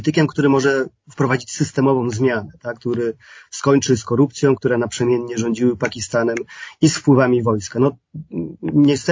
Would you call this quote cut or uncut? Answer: cut